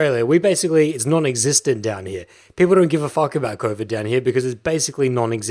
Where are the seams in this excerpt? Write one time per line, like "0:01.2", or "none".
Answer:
none